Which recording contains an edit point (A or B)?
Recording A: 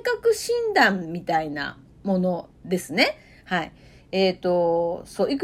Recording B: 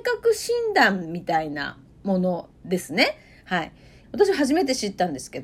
B